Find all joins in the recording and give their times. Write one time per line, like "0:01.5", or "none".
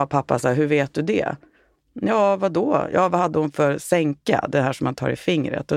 none